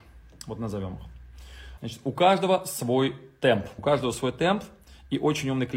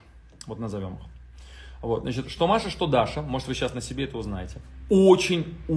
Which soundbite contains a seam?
first; 2 cuts; at 1.8 s, 3.8 s

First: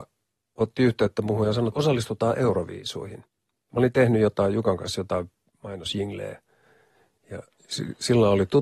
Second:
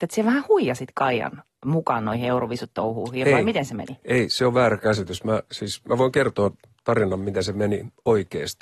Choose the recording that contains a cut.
first; 1 cut; at 1.7 s

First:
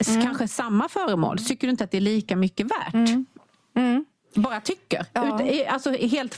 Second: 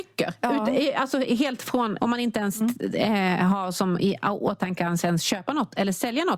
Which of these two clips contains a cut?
second; 1 cut; at 2.0 s

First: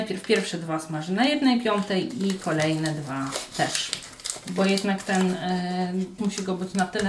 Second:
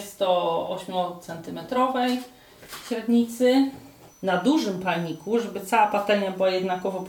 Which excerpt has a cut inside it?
first; 1 cut; at 6.2 s

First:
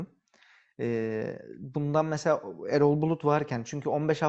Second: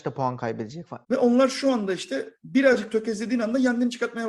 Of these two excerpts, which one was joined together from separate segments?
second; 1 cut; at 1.0 s

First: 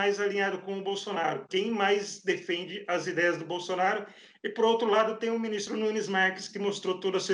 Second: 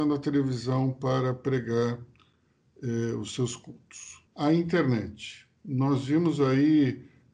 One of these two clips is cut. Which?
second; 1 cut; at 4.3 s

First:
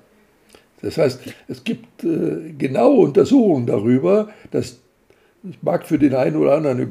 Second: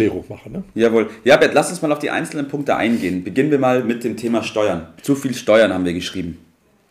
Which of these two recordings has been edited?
second; 1 cut; at 5.0 s

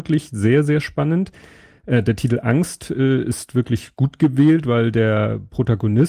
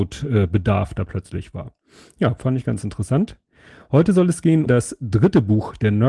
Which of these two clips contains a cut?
second; 1 cut; at 4.7 s

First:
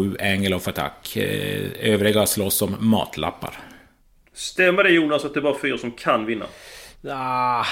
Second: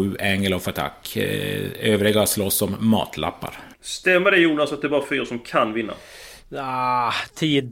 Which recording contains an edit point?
second; 1 cut; at 3.7 s

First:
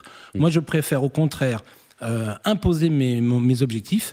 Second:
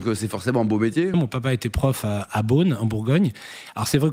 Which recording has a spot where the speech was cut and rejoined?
second; 1 cut; at 1.1 s

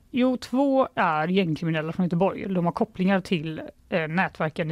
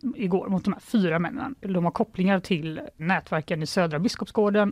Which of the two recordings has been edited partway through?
second; 2 cuts; at 1.6 s, 3.0 s

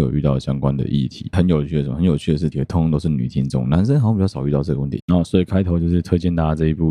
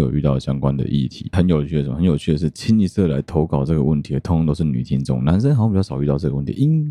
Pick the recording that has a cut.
first; 2 cuts; at 2.5 s, 5.0 s

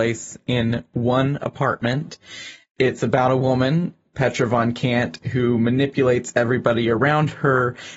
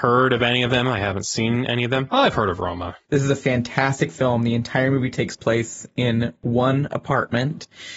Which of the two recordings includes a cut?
second; 1 cut; at 3.1 s

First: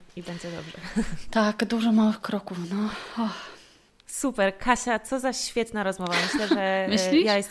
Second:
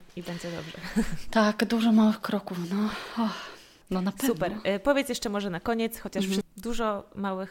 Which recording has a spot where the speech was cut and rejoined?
second; 2 cuts; at 3.8 s, 6.4 s

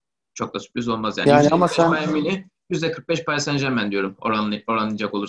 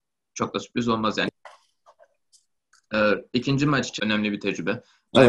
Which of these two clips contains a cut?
second; 2 cuts; at 1.3 s, 4.0 s

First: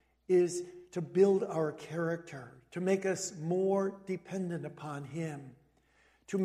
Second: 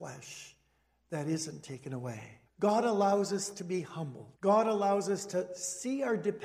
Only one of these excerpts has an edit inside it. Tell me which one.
second; 2 cuts; at 2.5 s, 4.3 s

